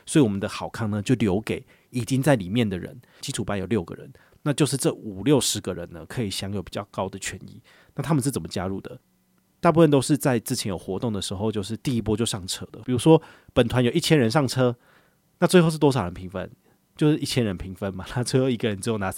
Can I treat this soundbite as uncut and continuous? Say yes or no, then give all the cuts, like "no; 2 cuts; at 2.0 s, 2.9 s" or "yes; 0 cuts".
no; 2 cuts; at 3.2 s, 12.8 s